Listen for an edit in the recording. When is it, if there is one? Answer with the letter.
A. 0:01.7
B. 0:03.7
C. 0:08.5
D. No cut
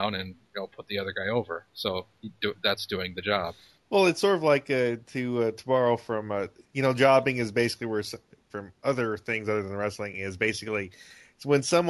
C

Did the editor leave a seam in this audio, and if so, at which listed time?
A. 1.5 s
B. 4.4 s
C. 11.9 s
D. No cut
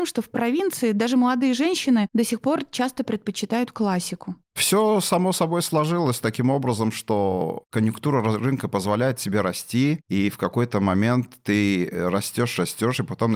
D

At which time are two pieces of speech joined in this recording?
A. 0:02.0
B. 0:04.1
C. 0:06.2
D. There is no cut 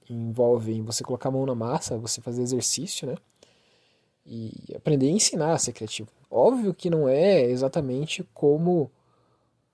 C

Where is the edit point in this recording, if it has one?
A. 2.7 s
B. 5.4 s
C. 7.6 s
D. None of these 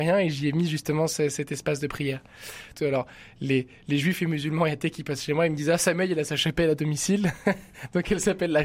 A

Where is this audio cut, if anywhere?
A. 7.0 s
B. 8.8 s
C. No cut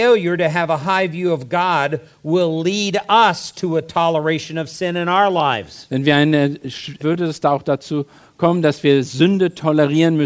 A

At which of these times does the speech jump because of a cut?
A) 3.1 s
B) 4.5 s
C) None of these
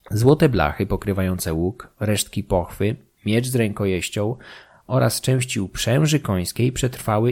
C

